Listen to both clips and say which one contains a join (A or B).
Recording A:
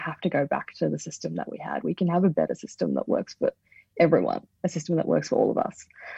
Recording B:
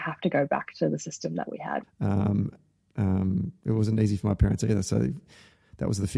B